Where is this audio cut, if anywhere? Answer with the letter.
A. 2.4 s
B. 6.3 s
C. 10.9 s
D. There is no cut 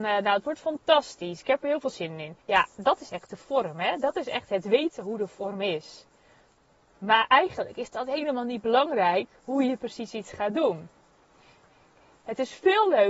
A